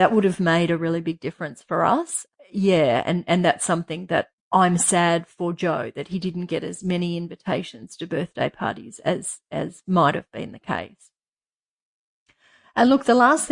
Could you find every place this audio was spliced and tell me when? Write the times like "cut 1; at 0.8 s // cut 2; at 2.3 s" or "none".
none